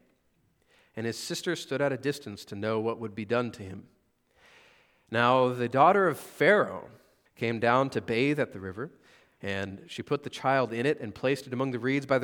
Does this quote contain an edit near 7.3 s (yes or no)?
yes